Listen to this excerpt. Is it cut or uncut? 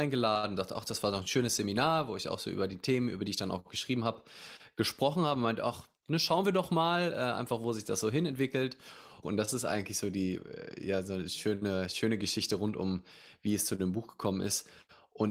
cut